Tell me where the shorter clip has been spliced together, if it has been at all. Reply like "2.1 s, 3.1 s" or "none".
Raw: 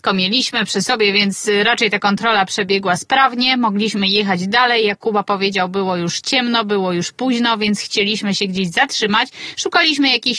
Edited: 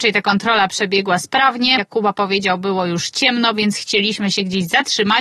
1.8 s, 3.5 s